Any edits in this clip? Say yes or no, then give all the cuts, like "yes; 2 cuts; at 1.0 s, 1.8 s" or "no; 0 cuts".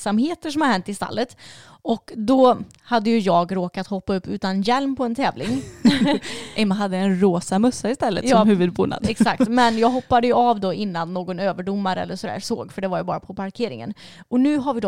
no; 0 cuts